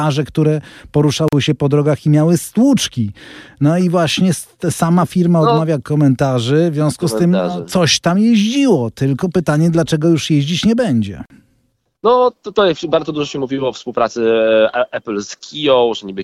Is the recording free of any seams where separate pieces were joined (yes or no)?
yes